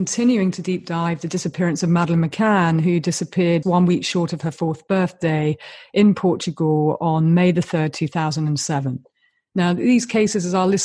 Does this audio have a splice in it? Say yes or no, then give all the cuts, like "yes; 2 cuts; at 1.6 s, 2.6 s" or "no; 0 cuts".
yes; 1 cut; at 3.6 s